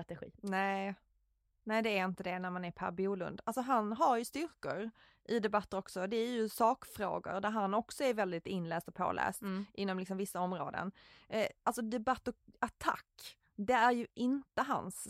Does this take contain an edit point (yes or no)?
no